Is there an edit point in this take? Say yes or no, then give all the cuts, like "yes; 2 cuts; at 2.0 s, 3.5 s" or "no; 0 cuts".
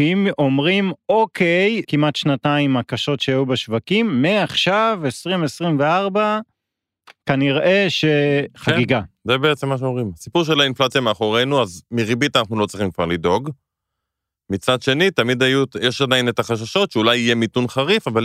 yes; 1 cut; at 1.8 s